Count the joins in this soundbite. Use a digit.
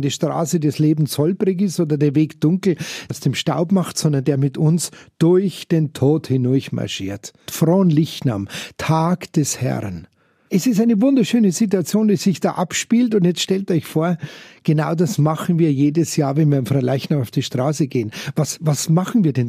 2